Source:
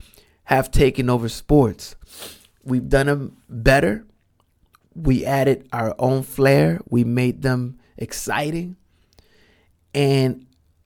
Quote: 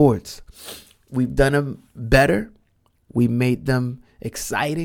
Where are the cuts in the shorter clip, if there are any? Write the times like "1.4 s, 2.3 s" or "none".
3.1 s

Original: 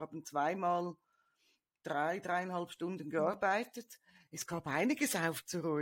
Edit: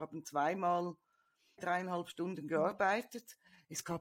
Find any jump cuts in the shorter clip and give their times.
1.6 s

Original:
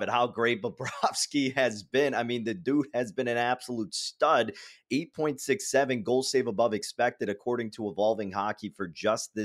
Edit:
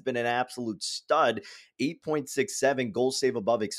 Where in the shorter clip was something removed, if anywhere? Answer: none

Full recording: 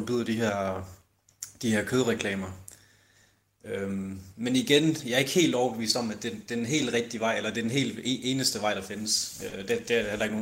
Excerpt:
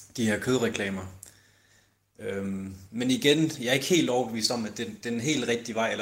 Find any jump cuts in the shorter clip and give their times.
none

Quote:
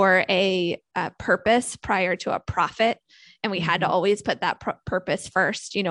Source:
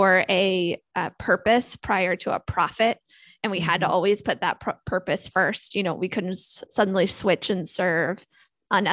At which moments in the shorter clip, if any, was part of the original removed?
none

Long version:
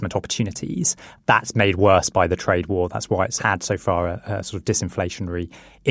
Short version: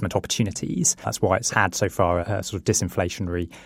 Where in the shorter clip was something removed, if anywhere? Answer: 1.0 s, 2.2 s

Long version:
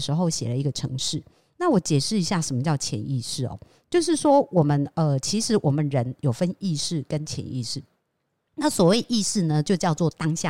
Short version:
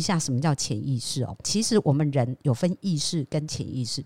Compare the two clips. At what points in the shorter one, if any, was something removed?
1.4 s

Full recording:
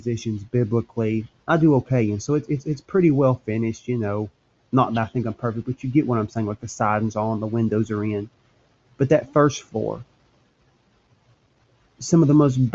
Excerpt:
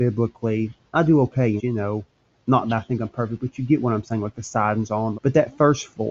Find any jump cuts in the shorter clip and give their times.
1.6 s, 5.1 s

